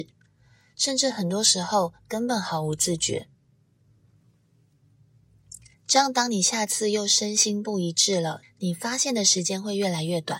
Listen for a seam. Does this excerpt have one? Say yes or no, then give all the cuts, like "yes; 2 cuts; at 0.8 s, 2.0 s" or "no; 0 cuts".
yes; 2 cuts; at 5.7 s, 8.4 s